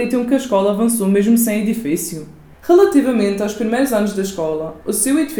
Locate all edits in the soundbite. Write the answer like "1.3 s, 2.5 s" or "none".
2.5 s